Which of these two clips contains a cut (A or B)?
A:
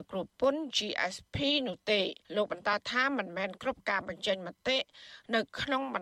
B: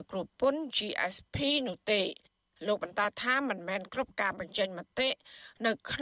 A